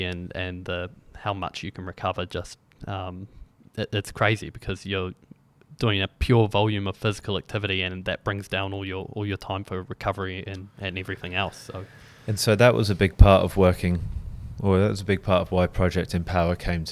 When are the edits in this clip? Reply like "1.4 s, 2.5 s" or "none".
none